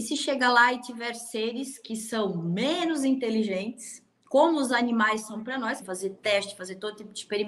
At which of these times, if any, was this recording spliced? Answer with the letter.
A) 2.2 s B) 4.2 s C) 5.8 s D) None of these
C